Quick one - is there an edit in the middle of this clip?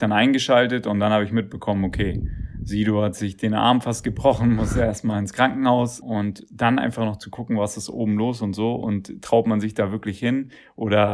yes; 1 cut; at 6.0 s

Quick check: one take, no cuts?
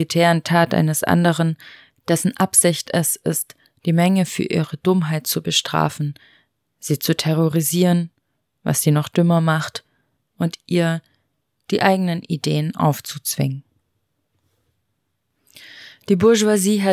yes; 0 cuts

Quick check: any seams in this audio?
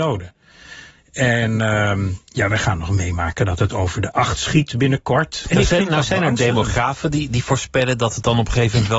yes; 2 cuts; at 1.0 s, 5.4 s

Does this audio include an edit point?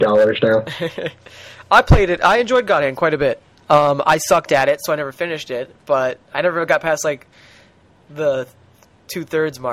no; 0 cuts

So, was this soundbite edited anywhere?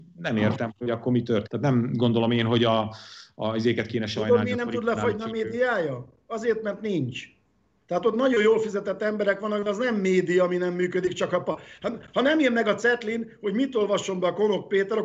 yes; 1 cut; at 1.5 s

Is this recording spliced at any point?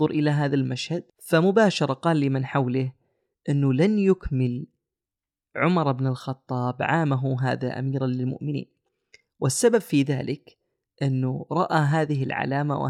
yes; 1 cut; at 1.1 s

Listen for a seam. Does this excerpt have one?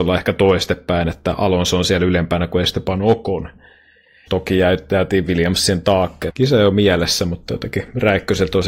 yes; 2 cuts; at 4.3 s, 6.3 s

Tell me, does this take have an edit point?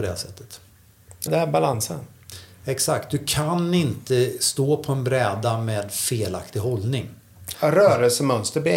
yes; 2 cuts; at 1.3 s, 7.5 s

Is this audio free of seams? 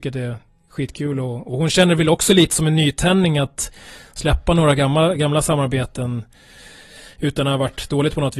yes; 0 cuts

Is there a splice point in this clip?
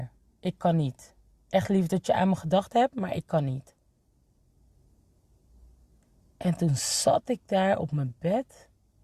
no; 0 cuts

